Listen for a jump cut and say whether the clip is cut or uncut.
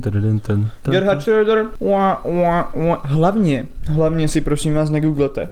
uncut